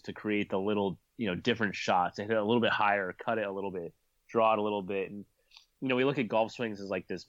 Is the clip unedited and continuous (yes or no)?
yes